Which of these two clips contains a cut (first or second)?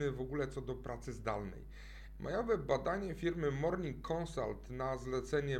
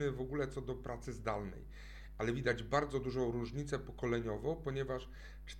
first